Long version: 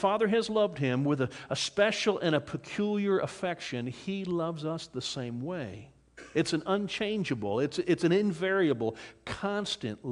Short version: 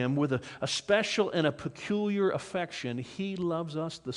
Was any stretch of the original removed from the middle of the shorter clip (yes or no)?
no